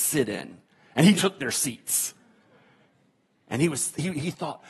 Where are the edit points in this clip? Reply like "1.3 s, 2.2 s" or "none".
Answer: 1.1 s